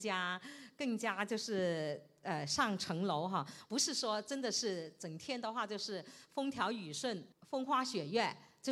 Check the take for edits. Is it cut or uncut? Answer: cut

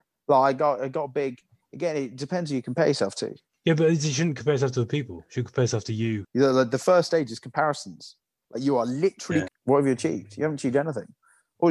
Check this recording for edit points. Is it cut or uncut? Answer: cut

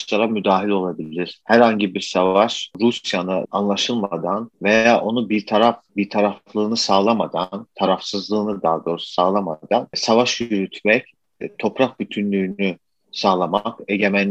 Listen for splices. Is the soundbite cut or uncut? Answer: cut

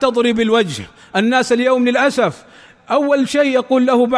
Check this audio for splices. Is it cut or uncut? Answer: uncut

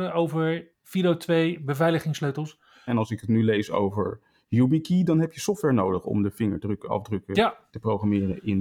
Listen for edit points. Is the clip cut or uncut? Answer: cut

